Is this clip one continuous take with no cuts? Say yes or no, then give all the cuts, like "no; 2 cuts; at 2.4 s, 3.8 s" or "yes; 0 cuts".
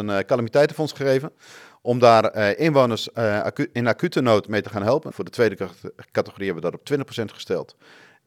no; 1 cut; at 5.1 s